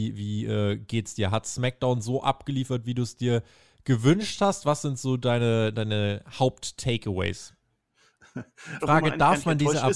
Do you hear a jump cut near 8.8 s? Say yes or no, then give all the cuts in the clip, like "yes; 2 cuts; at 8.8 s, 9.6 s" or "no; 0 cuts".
yes; 1 cut; at 8.8 s